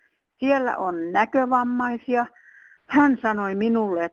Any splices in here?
yes; 1 cut; at 2.8 s

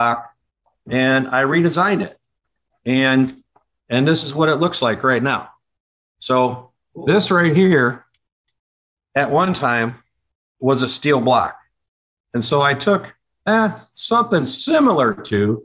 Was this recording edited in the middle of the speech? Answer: no; 0 cuts

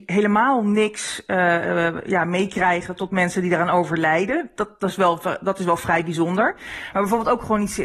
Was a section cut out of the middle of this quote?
yes; 1 cut; at 6.9 s

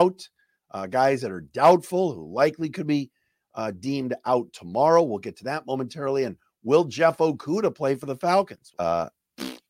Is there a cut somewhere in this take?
yes; 1 cut; at 8.7 s

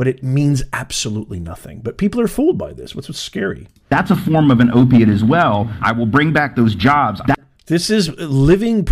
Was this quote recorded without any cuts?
no; 2 cuts; at 5.8 s, 7.2 s

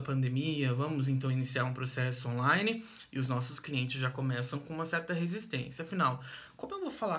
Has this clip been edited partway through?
no; 0 cuts

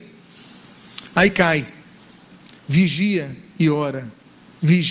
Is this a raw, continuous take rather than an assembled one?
yes; 0 cuts

